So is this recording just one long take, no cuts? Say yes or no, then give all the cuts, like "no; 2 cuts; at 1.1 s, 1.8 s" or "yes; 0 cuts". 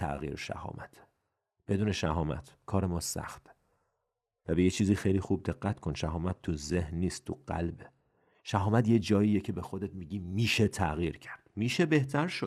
yes; 0 cuts